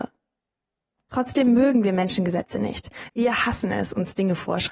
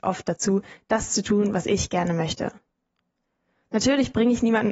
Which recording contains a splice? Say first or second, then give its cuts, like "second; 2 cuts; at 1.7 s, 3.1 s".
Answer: first; 1 cut; at 0.9 s